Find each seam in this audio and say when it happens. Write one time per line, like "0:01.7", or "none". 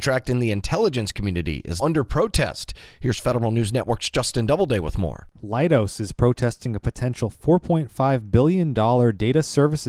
0:01.8